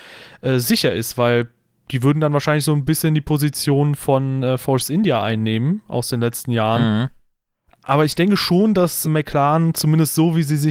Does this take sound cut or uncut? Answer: cut